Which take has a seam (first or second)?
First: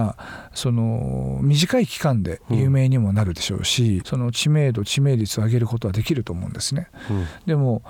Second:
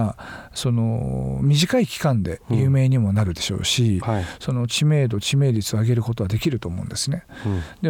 first